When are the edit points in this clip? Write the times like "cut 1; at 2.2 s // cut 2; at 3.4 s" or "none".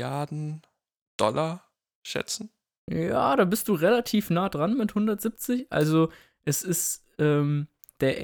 none

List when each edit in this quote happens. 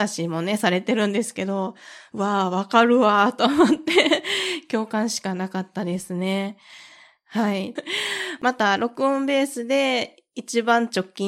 cut 1; at 7.8 s

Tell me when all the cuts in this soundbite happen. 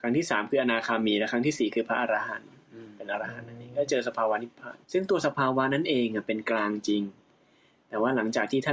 cut 1; at 4.8 s

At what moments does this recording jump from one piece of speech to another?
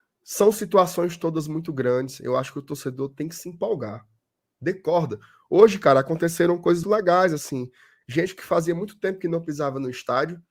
cut 1; at 6.8 s

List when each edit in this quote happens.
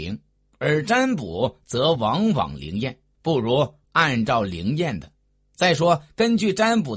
none

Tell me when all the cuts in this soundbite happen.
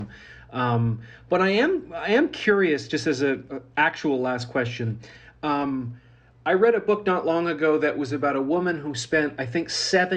none

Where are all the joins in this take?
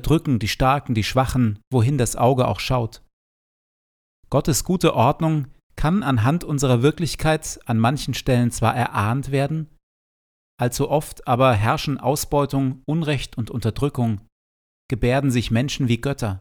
none

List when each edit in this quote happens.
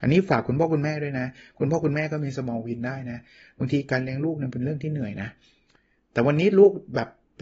none

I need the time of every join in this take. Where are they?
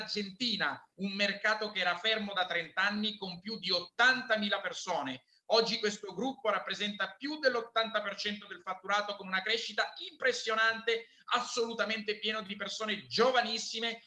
cut 1; at 6.4 s

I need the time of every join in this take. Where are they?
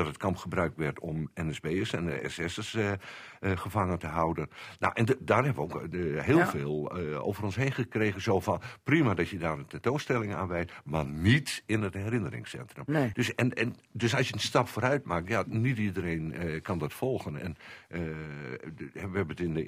cut 1; at 13.1 s

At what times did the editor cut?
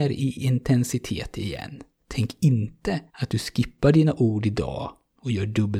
cut 1; at 2.0 s // cut 2; at 3.1 s

